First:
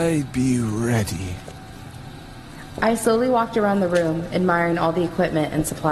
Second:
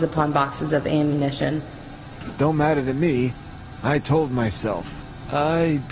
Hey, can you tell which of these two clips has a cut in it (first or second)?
second